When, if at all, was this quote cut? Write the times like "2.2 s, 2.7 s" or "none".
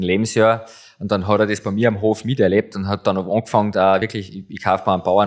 none